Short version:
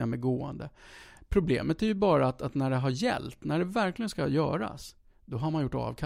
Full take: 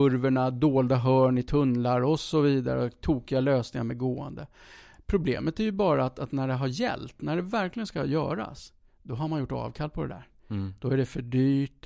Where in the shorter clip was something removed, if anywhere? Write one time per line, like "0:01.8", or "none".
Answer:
none